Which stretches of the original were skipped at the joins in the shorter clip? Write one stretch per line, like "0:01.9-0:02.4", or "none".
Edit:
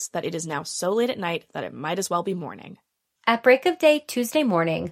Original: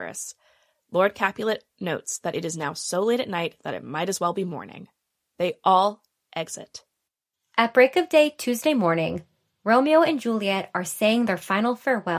0:05.3-0:07.5